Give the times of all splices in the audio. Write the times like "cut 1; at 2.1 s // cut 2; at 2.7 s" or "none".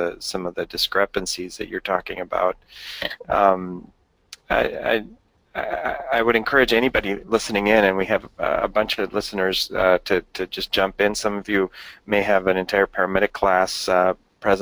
none